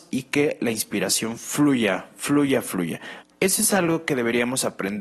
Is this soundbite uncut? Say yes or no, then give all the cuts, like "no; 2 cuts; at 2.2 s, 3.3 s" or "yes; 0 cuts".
no; 1 cut; at 3.2 s